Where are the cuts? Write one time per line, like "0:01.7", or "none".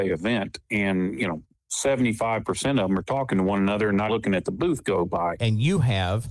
0:04.1
0:05.4